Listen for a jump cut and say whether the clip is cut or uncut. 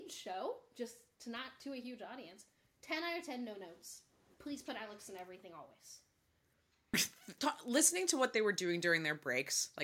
cut